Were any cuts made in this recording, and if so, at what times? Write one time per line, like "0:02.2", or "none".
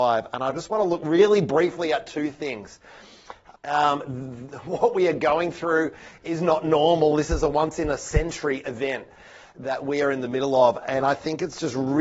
0:03.5